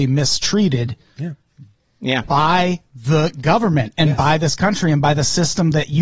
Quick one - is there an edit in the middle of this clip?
no; 0 cuts

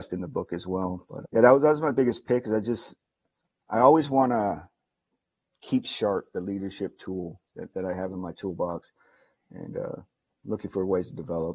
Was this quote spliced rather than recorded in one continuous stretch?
yes; 1 cut; at 1.2 s

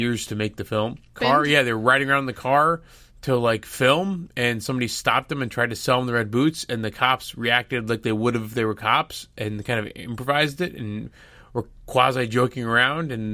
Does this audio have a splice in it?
yes; 1 cut; at 1.2 s

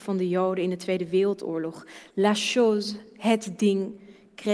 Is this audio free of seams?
yes; 0 cuts

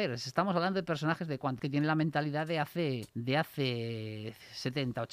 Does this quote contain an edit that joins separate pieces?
yes; 2 cuts; at 1.6 s, 3.1 s

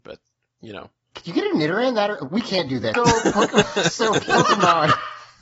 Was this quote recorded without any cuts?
no; 1 cut; at 2.9 s

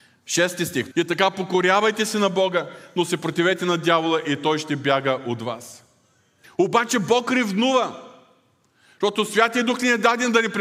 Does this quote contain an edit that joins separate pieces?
yes; 2 cuts; at 0.9 s, 6.4 s

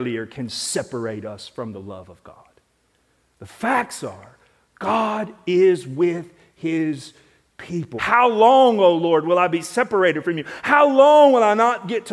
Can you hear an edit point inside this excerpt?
yes; 1 cut; at 8.0 s

